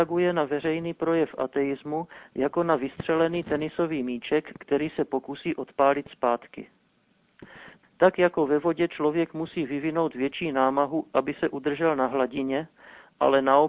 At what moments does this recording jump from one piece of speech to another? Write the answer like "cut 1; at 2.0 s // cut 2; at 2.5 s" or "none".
cut 1; at 7.8 s